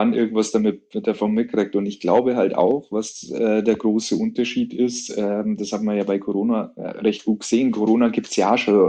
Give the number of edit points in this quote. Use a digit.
0